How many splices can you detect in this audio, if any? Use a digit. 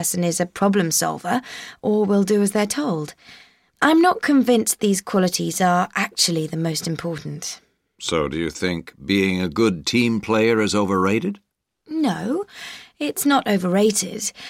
0